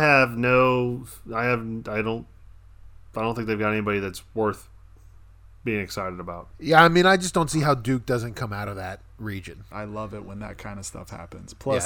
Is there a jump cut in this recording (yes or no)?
yes